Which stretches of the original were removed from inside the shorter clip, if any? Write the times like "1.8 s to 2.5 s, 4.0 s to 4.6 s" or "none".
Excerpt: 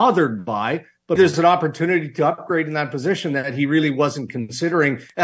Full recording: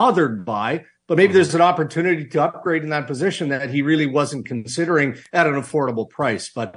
1.2 s to 1.3 s